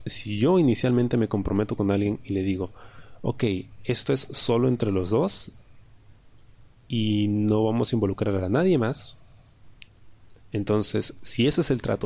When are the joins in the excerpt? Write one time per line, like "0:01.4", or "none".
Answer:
none